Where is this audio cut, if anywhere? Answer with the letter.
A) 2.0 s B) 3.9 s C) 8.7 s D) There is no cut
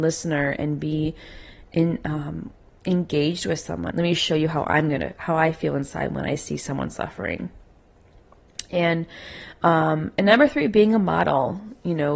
B